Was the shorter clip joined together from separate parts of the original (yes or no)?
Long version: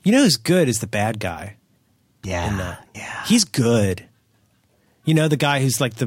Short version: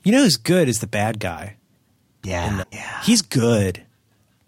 yes